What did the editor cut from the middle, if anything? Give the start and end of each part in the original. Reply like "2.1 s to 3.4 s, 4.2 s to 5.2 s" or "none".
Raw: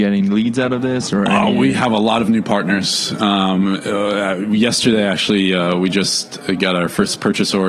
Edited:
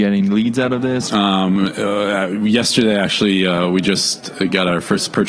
1.1 s to 3.2 s